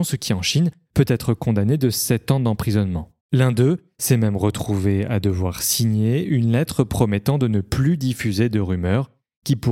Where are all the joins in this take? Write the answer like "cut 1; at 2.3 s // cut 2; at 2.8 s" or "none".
cut 1; at 3.2 s